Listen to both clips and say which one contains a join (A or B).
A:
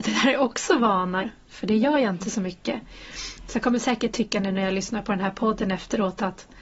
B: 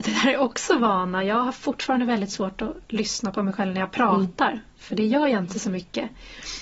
A